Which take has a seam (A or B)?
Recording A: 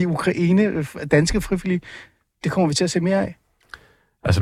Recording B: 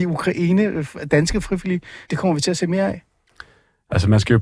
B